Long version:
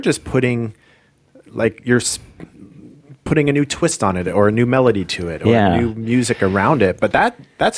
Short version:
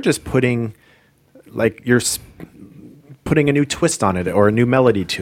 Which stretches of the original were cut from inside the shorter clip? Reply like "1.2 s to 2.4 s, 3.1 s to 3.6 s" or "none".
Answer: none